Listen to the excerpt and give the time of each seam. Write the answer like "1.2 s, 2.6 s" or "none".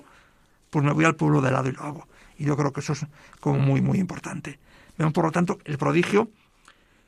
none